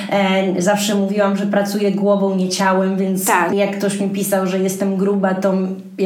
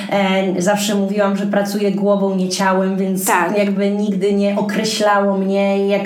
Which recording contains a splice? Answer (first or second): first